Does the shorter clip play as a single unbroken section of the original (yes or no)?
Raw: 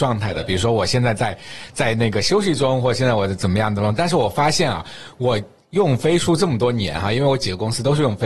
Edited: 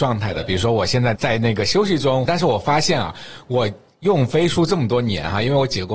no